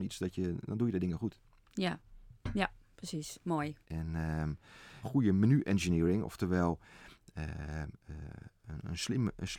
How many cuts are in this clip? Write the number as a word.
two